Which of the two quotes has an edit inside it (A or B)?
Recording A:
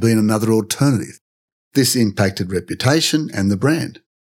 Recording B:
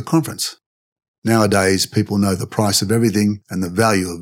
A